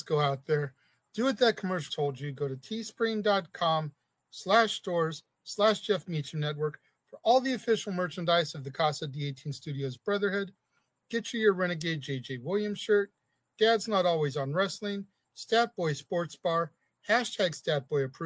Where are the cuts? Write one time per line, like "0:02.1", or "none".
0:01.9